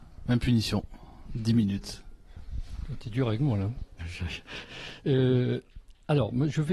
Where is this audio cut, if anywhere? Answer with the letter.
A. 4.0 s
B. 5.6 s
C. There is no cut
A